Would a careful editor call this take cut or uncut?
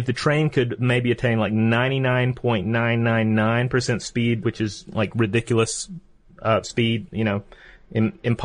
cut